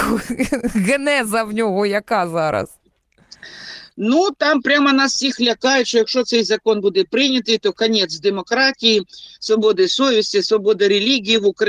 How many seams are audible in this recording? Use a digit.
1